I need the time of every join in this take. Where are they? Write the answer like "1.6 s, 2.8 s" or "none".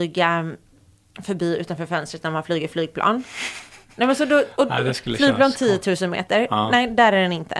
none